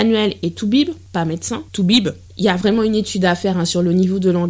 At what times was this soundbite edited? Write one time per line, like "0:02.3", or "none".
0:01.7